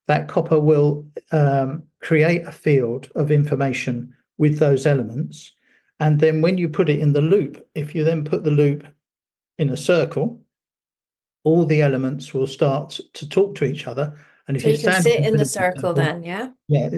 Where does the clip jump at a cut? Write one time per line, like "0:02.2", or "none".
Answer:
none